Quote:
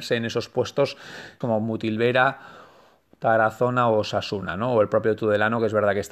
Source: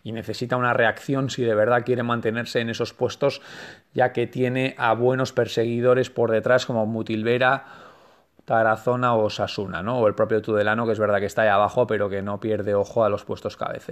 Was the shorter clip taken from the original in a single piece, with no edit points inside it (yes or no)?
no